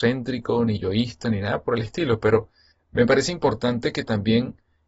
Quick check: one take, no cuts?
yes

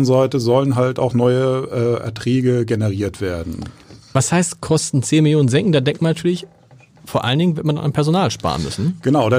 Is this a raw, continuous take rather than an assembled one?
yes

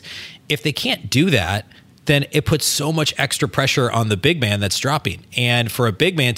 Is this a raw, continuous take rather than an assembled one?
yes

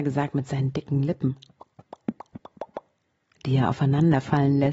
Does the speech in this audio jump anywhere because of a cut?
no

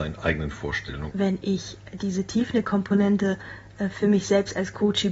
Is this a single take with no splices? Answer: no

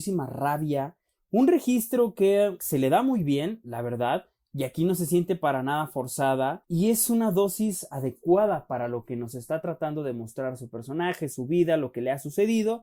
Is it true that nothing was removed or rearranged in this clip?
yes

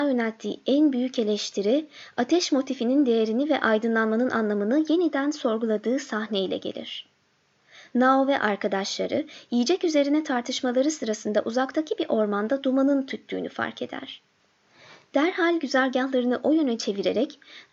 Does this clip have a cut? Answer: no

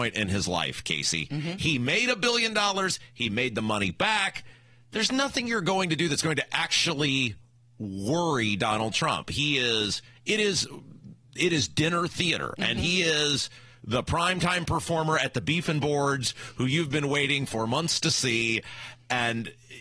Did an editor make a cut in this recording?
yes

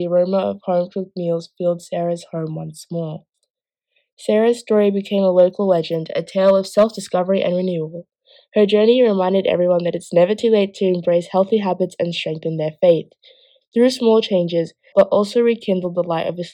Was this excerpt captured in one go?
no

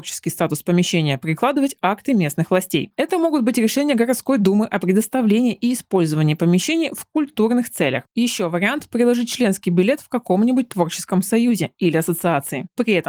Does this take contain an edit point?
yes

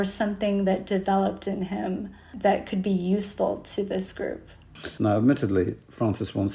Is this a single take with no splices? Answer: no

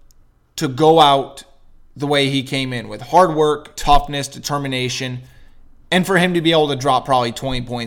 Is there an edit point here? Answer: yes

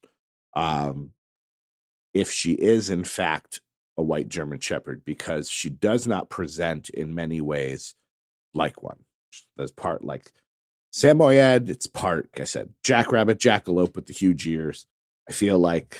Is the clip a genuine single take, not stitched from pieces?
no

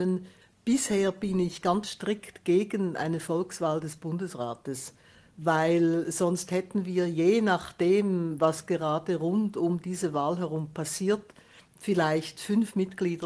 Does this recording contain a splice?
no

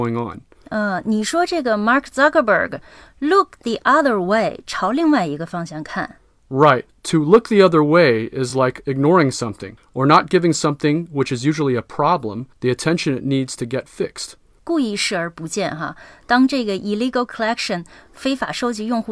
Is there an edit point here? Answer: no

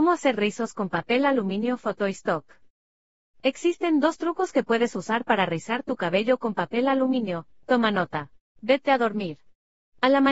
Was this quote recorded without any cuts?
no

